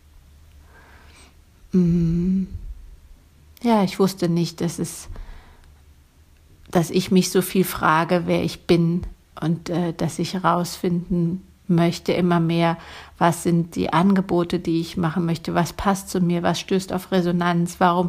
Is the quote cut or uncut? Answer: uncut